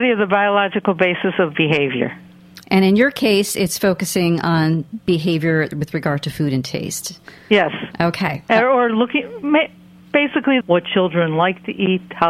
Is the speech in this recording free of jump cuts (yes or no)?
no